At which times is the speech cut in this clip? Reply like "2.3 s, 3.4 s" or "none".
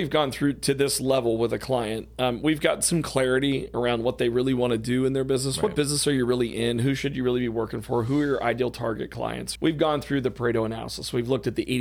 9.6 s